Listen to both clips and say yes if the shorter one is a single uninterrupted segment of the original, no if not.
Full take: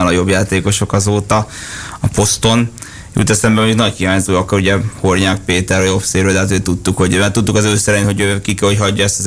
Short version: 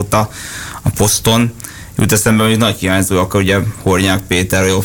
yes